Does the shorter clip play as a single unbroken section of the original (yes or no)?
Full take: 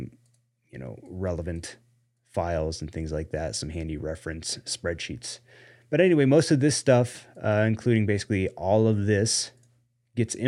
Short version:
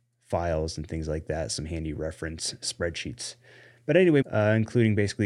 no